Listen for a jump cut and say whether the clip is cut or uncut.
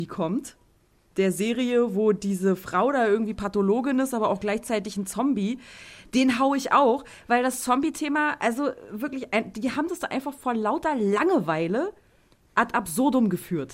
uncut